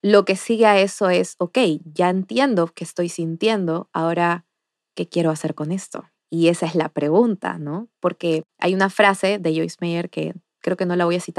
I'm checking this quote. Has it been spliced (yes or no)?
no